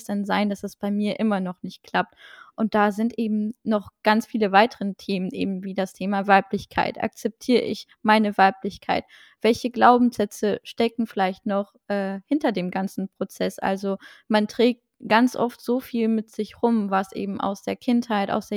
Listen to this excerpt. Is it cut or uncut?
uncut